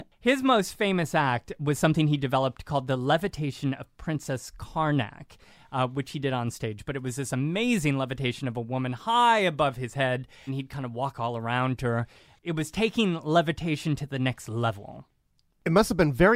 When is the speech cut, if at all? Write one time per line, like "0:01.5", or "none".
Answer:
0:10.5